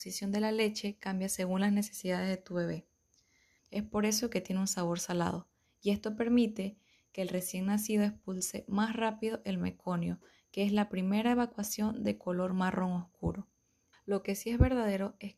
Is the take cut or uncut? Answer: cut